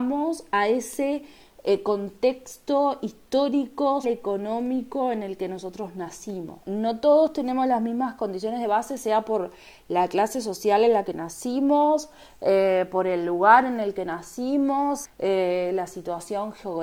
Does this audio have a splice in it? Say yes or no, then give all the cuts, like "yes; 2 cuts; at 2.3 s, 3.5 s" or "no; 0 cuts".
yes; 3 cuts; at 4.0 s, 6.6 s, 15.0 s